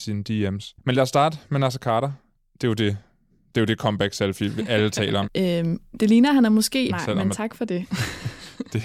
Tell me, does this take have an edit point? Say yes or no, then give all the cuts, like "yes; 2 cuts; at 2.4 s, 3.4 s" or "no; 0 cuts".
yes; 2 cuts; at 5.2 s, 6.9 s